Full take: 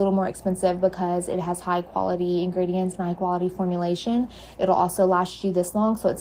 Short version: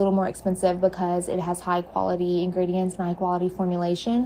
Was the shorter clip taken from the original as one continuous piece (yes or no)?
yes